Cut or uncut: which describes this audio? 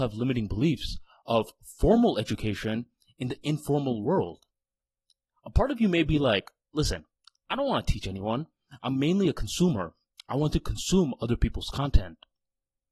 uncut